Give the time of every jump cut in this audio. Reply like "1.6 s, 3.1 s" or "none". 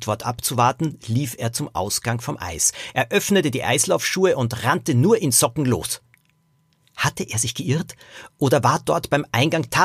none

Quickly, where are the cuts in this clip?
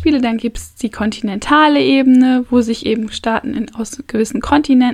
none

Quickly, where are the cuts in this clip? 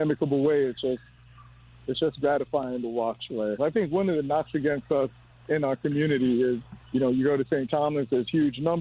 3.6 s, 6.8 s

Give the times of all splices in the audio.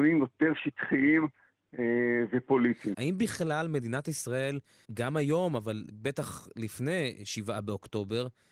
2.9 s, 4.8 s

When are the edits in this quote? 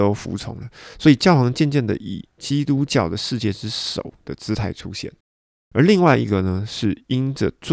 none

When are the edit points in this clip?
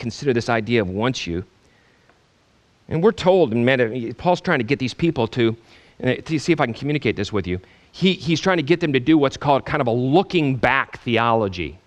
none

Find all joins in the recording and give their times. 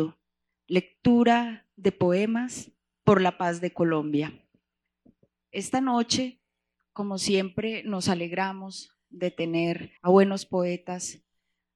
5.4 s, 10.0 s

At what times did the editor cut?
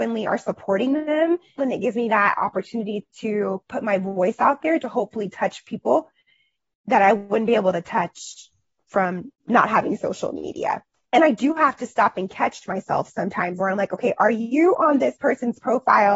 1.6 s, 11.1 s, 13.6 s

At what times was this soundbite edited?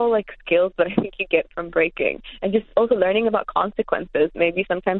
none

